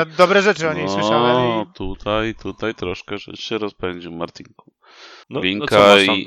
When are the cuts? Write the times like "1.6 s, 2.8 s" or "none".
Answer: 5.2 s